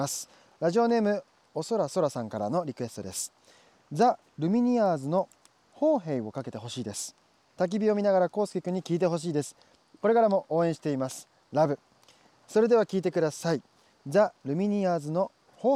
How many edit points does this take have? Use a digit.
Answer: 0